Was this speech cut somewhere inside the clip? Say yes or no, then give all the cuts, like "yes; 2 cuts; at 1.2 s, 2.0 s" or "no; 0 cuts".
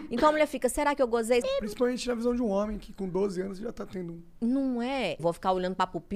yes; 2 cuts; at 1.4 s, 5.2 s